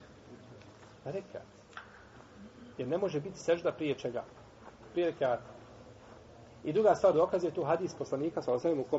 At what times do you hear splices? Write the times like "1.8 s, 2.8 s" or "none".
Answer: 2.7 s